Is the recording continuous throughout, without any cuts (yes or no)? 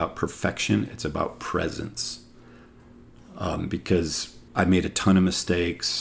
no